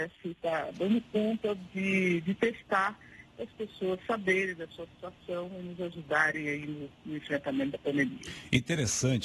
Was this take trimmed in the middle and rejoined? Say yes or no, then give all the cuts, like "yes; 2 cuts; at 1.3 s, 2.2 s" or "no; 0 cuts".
no; 0 cuts